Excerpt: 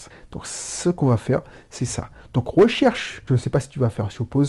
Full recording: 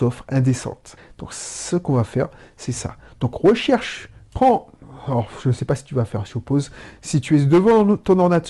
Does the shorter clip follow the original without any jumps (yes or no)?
no